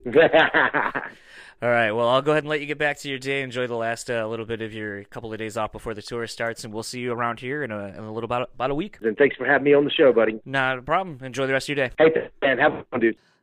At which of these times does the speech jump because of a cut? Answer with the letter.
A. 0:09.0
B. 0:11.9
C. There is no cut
A